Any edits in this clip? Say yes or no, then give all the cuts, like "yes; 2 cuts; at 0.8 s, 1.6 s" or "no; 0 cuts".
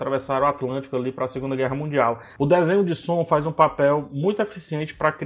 yes; 1 cut; at 2.4 s